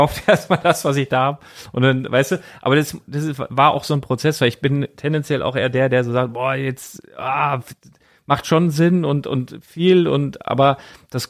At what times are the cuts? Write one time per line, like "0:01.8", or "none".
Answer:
none

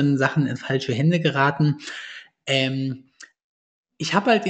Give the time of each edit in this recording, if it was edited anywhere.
none

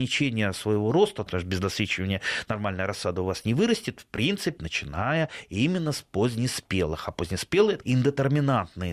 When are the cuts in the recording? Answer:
0:01.3
0:04.6
0:07.8

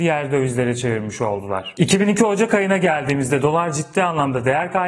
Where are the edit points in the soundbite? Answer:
none

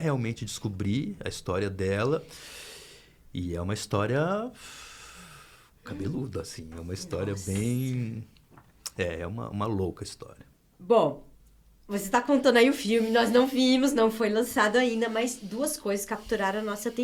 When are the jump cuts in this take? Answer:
none

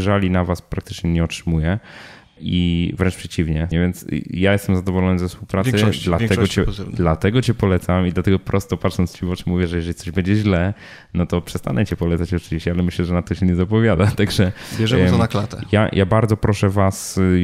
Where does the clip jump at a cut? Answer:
0:03.7

